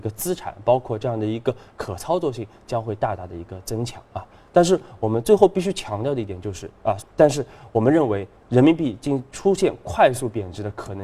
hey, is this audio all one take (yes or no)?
no